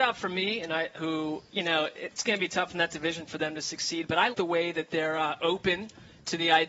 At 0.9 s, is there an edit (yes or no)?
yes